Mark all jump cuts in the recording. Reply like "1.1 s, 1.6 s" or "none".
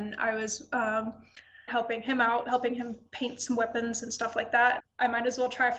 1.7 s, 4.8 s